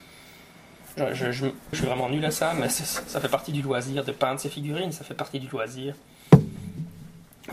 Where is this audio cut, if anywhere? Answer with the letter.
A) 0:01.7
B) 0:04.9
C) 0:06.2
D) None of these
A